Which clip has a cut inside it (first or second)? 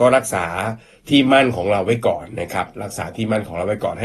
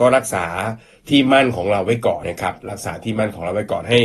second